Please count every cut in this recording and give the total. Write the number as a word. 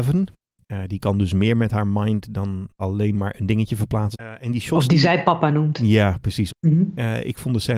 three